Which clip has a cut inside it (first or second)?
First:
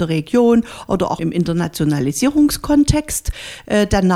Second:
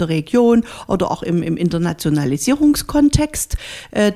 first